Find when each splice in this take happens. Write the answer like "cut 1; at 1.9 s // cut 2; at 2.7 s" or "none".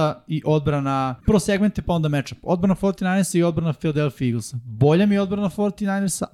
cut 1; at 1.2 s